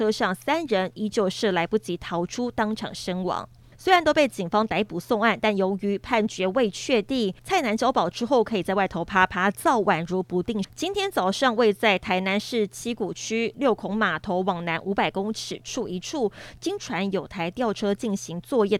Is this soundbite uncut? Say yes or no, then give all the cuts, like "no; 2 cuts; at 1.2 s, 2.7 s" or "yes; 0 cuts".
no; 2 cuts; at 3.7 s, 10.6 s